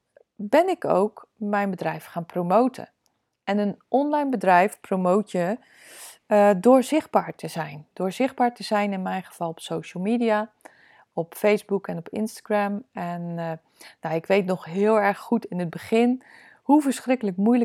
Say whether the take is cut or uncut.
uncut